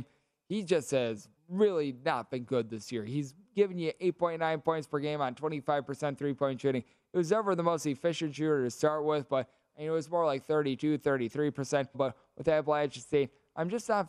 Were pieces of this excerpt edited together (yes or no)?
yes